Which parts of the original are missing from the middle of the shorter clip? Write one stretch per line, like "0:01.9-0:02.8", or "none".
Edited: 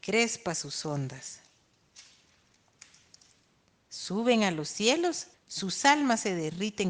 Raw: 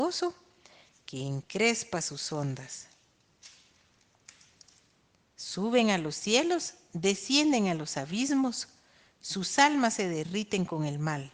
0:06.8-0:09.1